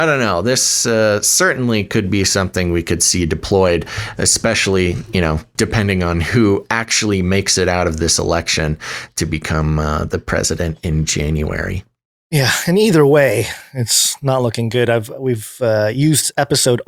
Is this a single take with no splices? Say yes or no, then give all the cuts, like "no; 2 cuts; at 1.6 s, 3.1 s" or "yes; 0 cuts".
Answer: yes; 0 cuts